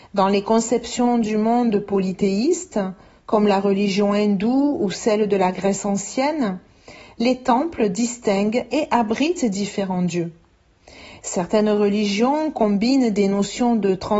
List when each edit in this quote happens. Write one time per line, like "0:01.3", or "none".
none